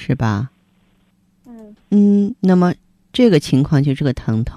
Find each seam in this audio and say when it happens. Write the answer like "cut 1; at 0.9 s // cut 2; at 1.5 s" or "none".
cut 1; at 1.8 s